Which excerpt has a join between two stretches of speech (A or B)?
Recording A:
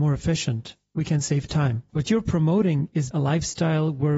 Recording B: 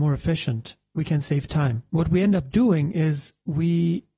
A